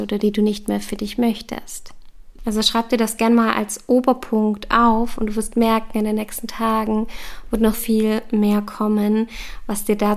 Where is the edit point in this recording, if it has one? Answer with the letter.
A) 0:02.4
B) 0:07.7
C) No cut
B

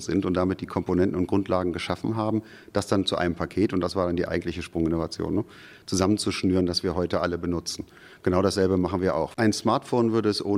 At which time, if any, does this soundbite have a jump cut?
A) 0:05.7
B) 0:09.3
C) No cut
B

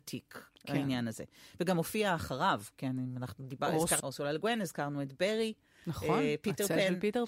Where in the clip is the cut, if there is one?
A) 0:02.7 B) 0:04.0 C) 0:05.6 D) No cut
B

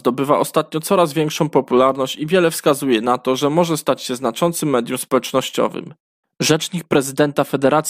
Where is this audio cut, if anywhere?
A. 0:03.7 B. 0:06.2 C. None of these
B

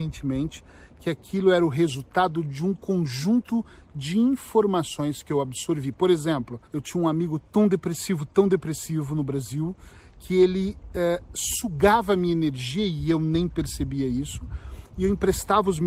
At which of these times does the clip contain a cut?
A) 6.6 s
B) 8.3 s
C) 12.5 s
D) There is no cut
A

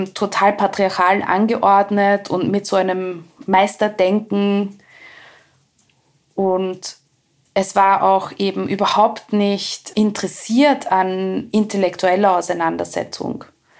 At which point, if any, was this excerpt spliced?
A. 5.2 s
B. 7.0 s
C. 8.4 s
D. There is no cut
D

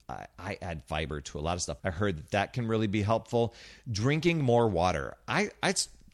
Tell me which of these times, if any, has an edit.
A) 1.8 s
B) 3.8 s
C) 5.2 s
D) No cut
A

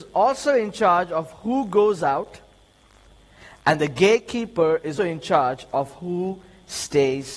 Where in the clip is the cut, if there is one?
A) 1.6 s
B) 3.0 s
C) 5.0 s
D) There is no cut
C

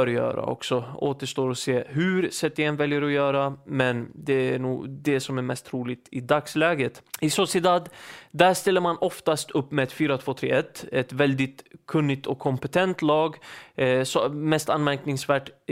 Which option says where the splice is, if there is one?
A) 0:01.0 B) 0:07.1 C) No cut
B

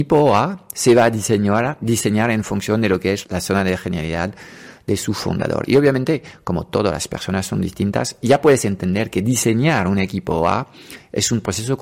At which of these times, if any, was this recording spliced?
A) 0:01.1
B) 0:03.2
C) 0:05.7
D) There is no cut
B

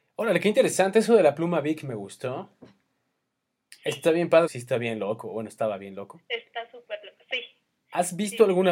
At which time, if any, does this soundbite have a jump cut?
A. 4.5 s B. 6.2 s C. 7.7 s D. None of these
A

